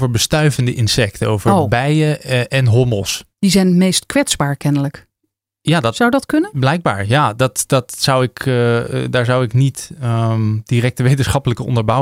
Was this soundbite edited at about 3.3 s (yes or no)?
yes